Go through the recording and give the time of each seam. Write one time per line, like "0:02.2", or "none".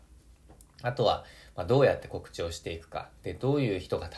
0:03.2